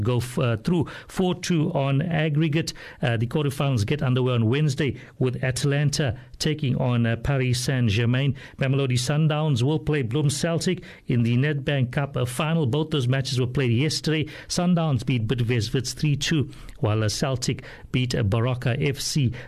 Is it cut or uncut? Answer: uncut